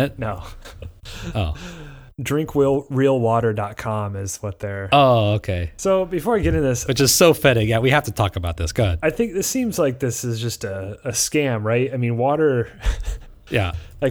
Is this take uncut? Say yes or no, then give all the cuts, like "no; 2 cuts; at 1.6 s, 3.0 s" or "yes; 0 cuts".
yes; 0 cuts